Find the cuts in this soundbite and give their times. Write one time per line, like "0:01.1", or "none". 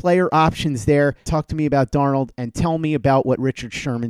0:01.2